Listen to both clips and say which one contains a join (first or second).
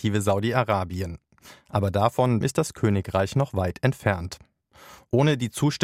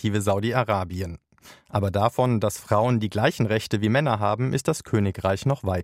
first